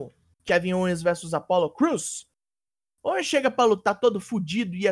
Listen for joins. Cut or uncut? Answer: uncut